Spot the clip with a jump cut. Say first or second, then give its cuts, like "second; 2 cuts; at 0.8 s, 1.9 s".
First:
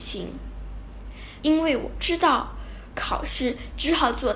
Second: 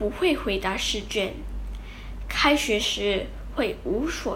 first; 2 cuts; at 1.4 s, 2.9 s